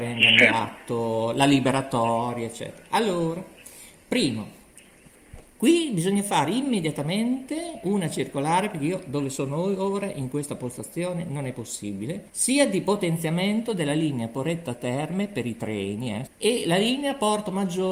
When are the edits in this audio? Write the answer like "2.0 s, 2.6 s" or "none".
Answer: 12.3 s, 16.3 s